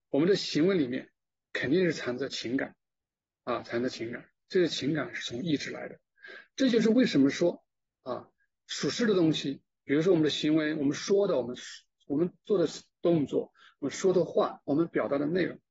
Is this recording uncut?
yes; 0 cuts

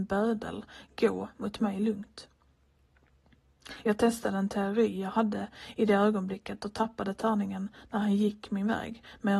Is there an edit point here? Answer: no; 0 cuts

